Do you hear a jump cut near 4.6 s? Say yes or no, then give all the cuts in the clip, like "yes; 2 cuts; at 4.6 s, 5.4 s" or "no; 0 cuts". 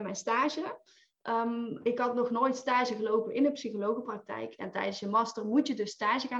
yes; 1 cut; at 4.6 s